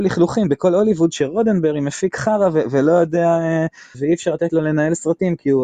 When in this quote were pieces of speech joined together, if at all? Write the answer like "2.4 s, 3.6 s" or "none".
3.9 s

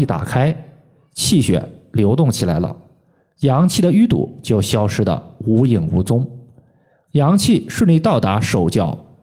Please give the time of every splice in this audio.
none

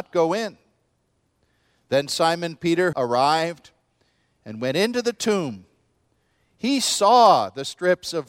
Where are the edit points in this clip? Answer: 2.9 s

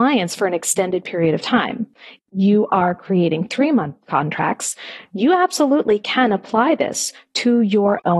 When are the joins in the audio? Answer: 2.2 s

